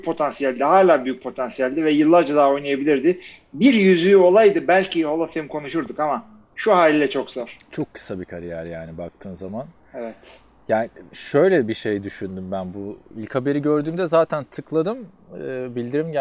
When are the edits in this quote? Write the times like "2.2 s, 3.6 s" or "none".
none